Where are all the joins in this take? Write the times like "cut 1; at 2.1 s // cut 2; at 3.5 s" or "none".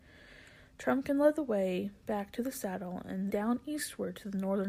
cut 1; at 3.3 s